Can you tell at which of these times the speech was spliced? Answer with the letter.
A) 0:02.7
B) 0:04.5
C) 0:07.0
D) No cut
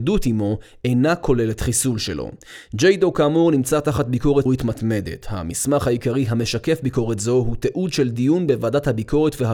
B